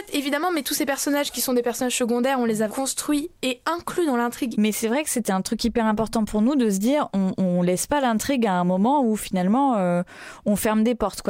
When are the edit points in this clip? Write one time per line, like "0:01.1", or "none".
0:02.7
0:04.5